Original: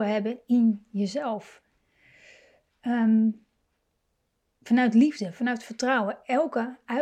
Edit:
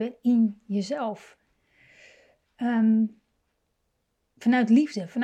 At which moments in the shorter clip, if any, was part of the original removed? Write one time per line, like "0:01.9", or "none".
none